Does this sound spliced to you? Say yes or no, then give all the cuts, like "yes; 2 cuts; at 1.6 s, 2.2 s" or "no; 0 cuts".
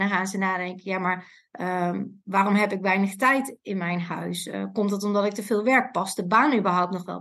no; 0 cuts